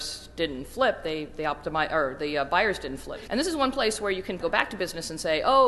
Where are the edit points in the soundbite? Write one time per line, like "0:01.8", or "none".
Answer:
0:03.3
0:04.4